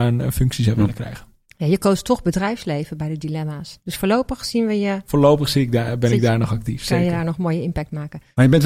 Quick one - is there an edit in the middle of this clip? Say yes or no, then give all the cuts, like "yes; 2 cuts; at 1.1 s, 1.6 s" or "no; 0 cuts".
no; 0 cuts